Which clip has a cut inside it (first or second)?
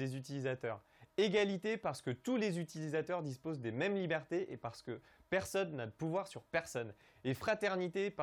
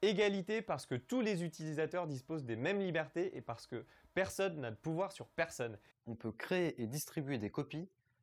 second